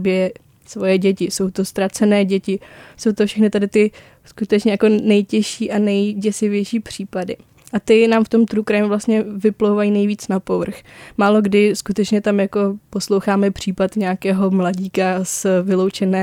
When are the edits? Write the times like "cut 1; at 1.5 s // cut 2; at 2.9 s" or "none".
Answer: none